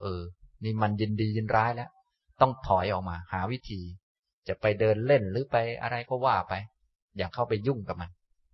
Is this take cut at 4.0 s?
no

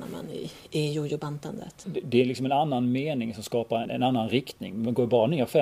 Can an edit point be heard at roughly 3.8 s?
yes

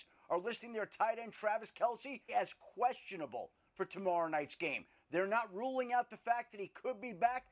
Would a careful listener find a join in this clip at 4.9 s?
no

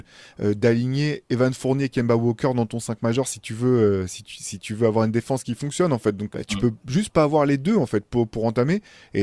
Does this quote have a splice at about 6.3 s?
yes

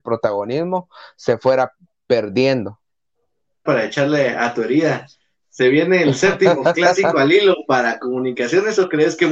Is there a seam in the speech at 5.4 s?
no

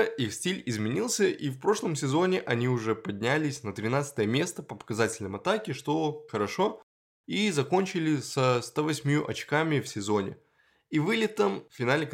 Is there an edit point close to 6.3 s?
yes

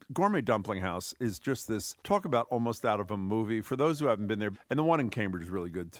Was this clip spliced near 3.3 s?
no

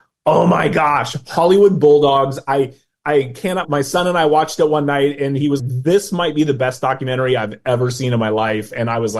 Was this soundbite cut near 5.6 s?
yes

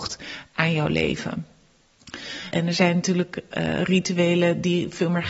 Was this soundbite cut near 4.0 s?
no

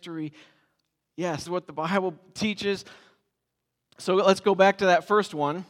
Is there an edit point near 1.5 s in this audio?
yes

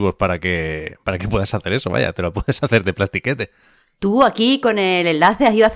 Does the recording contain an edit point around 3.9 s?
no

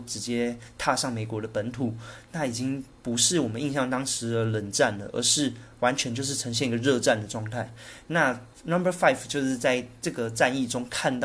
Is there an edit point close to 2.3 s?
no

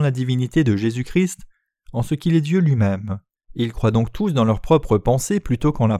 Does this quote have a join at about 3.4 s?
yes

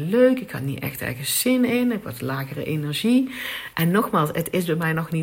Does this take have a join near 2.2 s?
no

